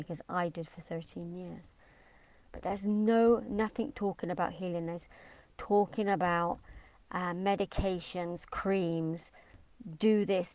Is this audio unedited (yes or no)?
yes